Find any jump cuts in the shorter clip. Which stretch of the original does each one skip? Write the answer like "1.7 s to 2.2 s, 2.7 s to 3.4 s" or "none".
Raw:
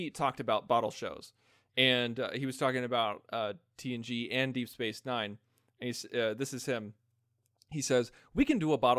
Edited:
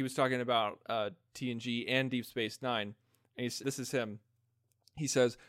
6.1 s to 6.4 s